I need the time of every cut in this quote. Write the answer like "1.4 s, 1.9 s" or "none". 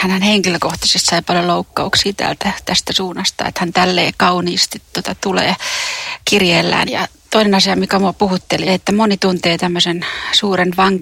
6.9 s, 8.7 s